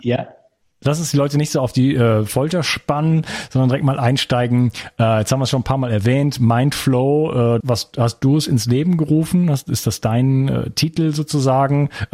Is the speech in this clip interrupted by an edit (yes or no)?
yes